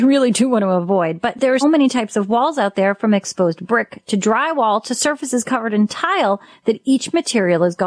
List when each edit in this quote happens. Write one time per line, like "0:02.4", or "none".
0:01.6